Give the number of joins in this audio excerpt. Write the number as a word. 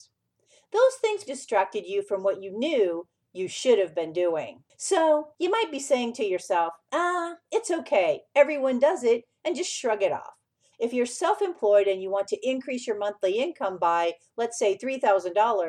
three